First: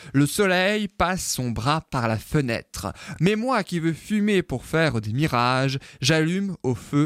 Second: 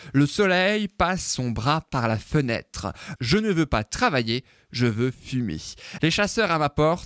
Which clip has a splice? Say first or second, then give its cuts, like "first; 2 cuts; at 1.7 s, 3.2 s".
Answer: second; 2 cuts; at 3.2 s, 6.0 s